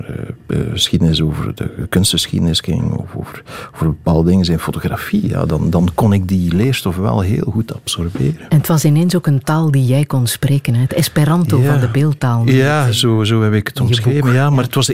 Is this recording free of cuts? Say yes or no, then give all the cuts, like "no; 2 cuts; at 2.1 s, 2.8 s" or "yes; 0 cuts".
yes; 0 cuts